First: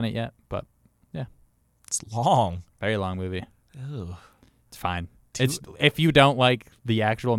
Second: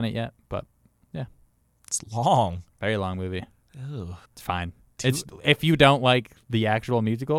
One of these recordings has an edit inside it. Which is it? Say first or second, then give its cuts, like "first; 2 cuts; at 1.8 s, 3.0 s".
second; 1 cut; at 4.3 s